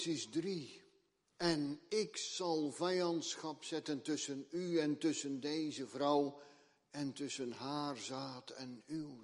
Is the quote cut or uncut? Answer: uncut